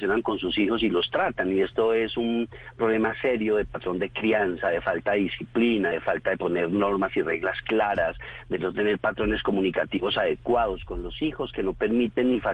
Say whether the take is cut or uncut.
uncut